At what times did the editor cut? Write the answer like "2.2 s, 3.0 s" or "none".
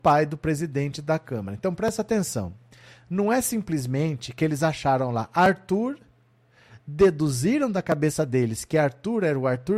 none